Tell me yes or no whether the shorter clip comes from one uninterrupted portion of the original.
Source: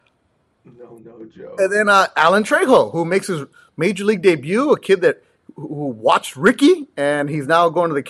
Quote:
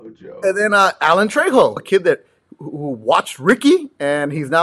no